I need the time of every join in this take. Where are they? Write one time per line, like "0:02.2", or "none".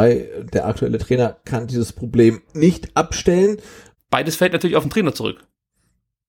0:03.9